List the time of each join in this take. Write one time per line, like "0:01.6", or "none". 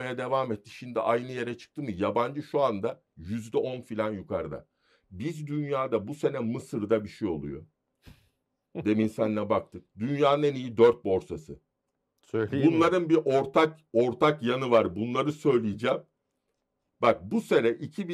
none